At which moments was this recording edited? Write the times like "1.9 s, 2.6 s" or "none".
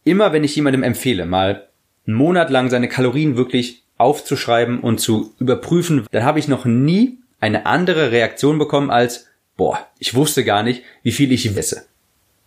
6.0 s, 11.5 s